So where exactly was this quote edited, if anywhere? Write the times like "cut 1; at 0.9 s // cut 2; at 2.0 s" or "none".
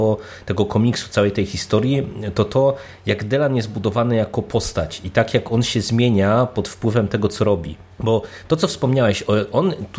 cut 1; at 7.9 s